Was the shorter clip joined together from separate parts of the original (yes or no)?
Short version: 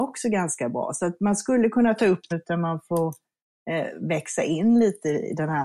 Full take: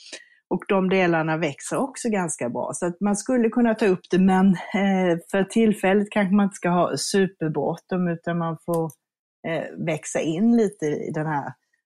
yes